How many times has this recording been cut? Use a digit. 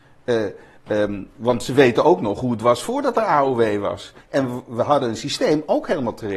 2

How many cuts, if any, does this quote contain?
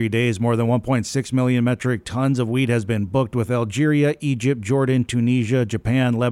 0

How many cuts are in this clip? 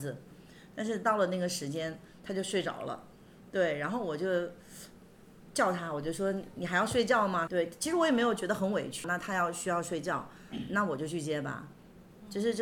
2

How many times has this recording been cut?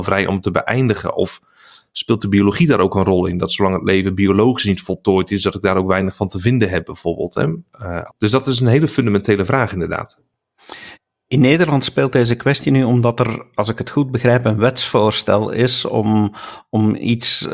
1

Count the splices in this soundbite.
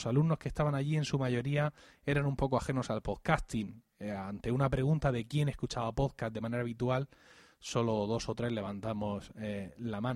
0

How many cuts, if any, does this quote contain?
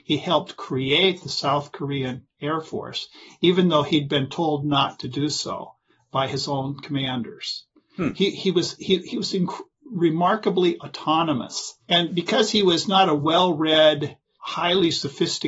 1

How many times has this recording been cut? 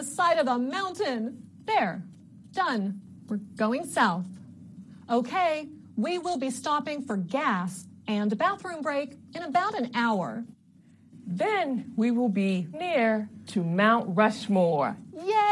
2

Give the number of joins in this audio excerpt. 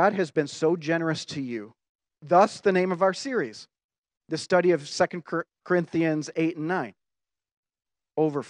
1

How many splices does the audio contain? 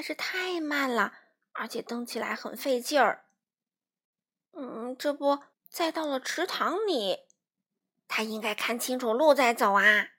2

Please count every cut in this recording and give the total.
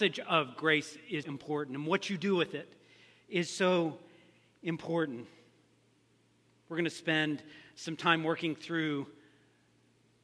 1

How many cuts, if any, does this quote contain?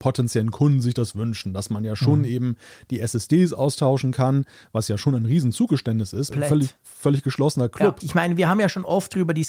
2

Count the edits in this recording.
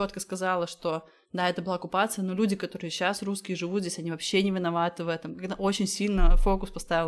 0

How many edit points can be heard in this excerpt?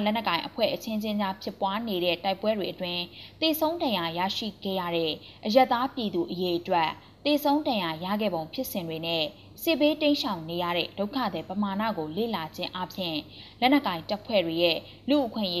0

